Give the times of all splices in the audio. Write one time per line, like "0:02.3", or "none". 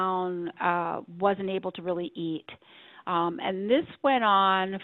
none